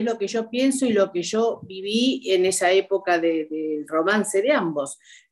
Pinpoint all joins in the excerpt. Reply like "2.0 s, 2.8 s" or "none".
none

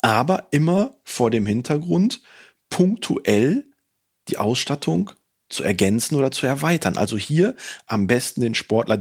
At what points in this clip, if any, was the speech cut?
none

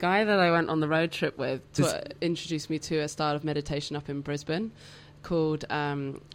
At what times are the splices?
none

